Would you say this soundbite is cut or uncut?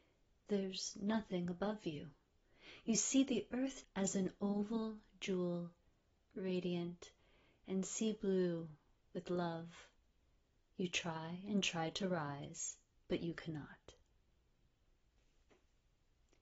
cut